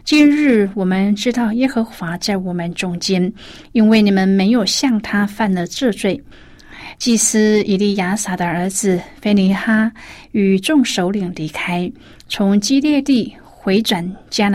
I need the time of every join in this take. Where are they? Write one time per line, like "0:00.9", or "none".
0:06.3